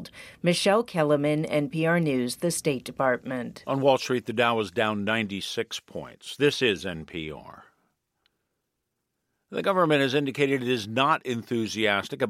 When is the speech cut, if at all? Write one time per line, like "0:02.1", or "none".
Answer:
none